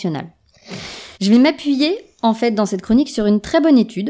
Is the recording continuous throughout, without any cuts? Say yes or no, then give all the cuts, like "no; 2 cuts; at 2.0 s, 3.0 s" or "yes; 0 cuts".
no; 1 cut; at 1.1 s